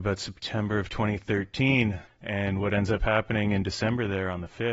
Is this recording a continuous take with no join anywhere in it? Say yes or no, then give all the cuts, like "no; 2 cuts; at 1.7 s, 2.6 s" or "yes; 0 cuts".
no; 1 cut; at 2.1 s